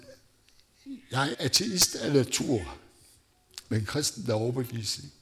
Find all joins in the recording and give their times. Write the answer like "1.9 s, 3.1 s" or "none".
1.3 s